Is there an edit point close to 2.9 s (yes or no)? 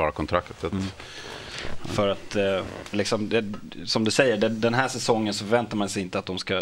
yes